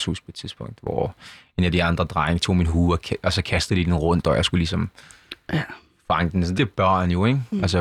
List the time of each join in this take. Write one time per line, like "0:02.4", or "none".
0:06.5